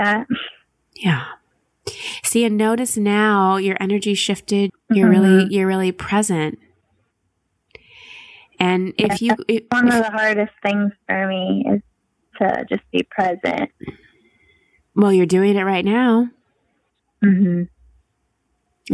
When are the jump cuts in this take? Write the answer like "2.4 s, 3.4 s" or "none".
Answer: 4.7 s